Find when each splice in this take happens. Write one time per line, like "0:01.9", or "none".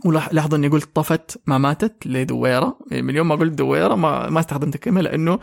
none